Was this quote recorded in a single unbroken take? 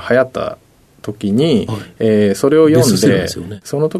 yes; 0 cuts

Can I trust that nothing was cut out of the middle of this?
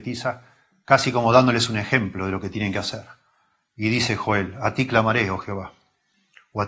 yes; 0 cuts

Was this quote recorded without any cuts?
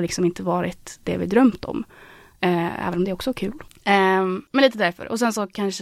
yes; 0 cuts

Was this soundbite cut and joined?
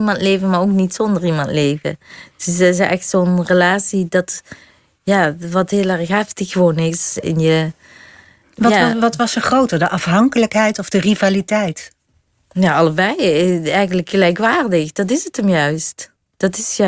no; 0 cuts

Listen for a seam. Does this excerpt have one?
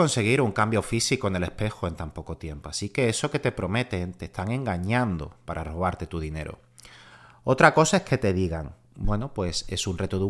no; 0 cuts

